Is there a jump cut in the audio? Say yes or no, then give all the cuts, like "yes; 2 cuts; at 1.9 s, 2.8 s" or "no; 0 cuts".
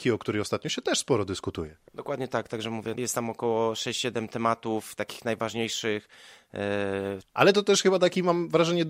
yes; 2 cuts; at 2.9 s, 7.2 s